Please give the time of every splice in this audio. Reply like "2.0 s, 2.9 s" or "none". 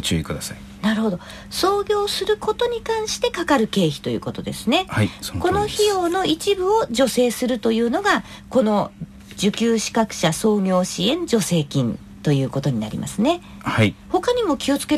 14.0 s